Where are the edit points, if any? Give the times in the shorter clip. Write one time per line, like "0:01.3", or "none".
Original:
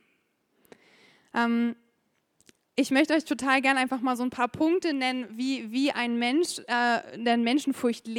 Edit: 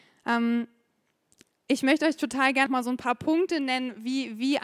0:02.7